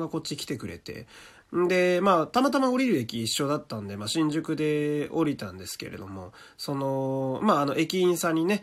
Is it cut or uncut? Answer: uncut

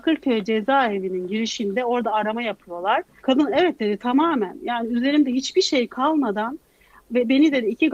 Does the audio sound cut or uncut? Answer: cut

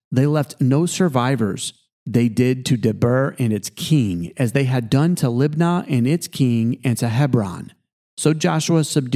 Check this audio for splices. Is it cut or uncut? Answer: uncut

